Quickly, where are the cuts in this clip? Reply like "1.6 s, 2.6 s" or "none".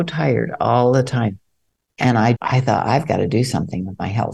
2.3 s